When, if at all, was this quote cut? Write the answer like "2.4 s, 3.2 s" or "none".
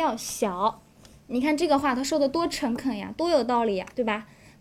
none